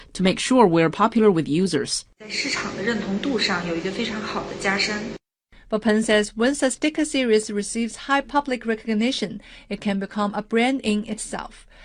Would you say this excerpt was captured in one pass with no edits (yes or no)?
yes